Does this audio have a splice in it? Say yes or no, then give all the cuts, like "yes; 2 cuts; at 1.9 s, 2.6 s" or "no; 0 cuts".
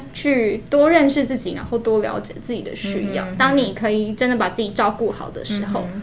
no; 0 cuts